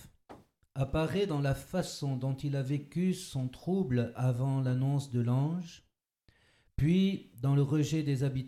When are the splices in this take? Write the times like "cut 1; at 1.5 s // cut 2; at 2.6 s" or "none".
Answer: none